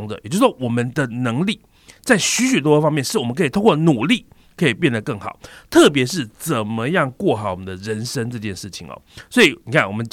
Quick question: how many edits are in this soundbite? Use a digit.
0